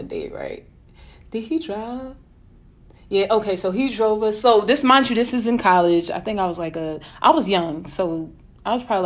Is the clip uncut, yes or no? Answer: yes